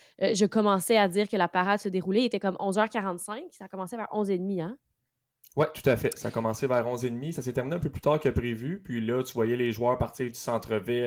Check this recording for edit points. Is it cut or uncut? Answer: uncut